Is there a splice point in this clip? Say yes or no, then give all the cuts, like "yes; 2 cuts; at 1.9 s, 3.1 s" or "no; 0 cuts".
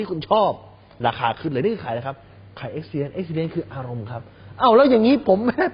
no; 0 cuts